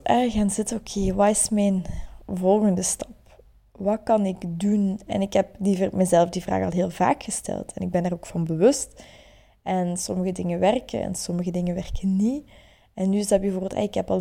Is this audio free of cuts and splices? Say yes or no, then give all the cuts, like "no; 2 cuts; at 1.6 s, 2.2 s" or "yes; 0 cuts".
yes; 0 cuts